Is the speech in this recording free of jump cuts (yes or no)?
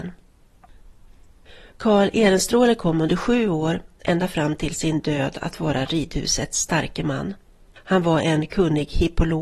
yes